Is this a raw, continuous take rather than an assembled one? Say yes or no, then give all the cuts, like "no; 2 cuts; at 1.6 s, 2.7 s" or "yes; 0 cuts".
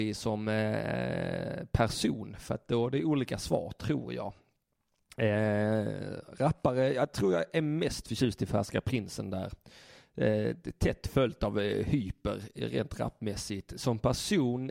yes; 0 cuts